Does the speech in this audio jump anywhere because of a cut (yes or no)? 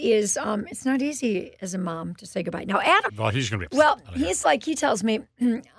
yes